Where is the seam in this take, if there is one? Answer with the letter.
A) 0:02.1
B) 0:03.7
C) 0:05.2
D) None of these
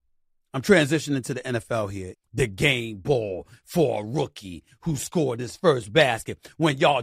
A